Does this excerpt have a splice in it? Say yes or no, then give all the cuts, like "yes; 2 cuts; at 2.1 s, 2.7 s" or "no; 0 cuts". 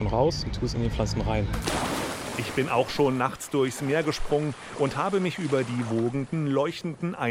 no; 0 cuts